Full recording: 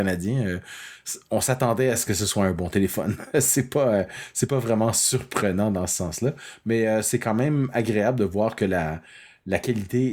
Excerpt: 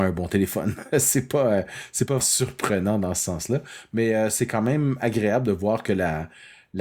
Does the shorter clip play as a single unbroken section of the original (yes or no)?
no